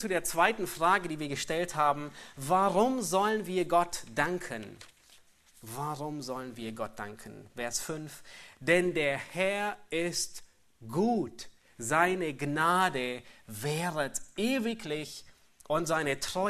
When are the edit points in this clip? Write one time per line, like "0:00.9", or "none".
none